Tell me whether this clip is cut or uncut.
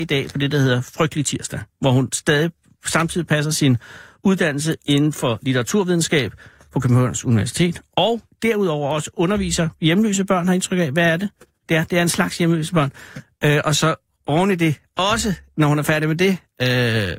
uncut